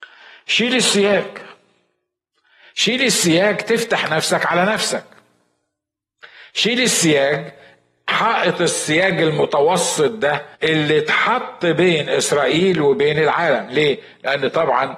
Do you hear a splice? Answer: yes; 1 cut; at 10.5 s

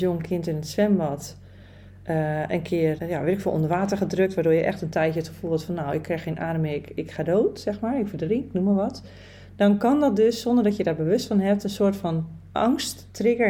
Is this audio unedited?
no; 1 cut; at 3.0 s

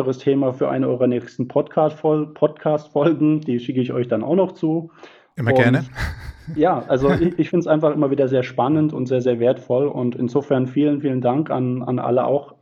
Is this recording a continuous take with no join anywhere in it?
yes; 0 cuts

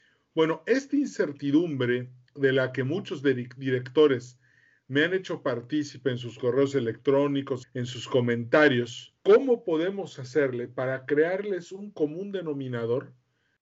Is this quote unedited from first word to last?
no; 2 cuts; at 7.6 s, 9.2 s

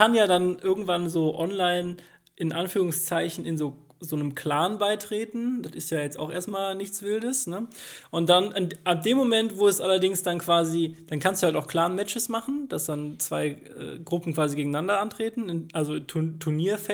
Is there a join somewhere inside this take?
no; 0 cuts

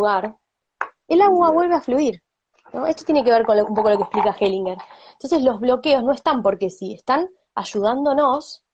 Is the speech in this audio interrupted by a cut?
no; 0 cuts

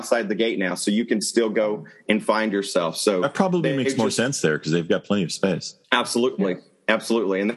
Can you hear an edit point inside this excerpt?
yes; 1 cut; at 5.8 s

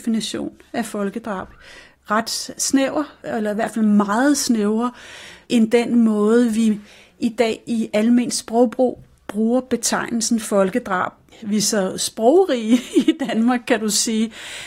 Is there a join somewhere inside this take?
no; 0 cuts

